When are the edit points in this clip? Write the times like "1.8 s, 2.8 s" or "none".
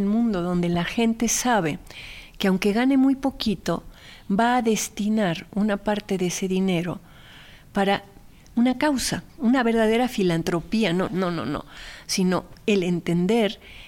9.3 s, 11.1 s